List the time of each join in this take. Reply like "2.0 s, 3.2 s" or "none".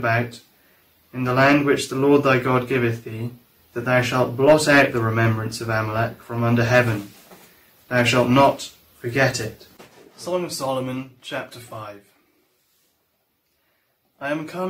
3.5 s